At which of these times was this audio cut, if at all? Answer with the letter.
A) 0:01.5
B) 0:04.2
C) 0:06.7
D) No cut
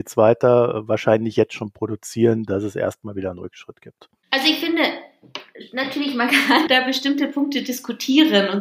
C